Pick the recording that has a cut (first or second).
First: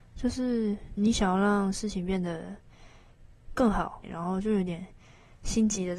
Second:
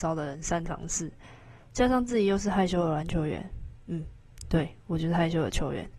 first